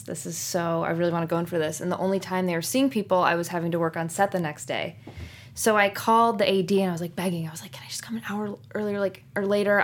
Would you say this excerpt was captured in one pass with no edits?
yes; 0 cuts

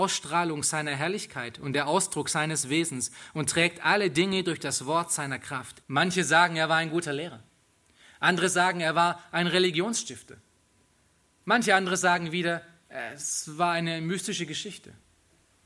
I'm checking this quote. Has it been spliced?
yes; 1 cut; at 5.8 s

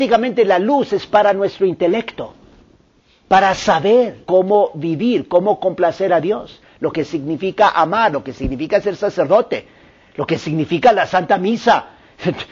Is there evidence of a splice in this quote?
yes; 2 cuts; at 4.3 s, 8.1 s

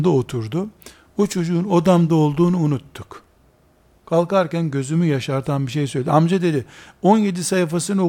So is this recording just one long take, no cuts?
yes; 0 cuts

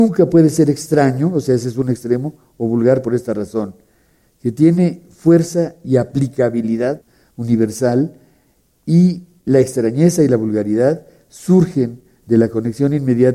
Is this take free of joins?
yes; 0 cuts

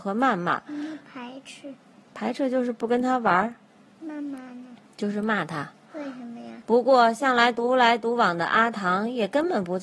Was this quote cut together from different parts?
yes; 1 cut; at 6.6 s

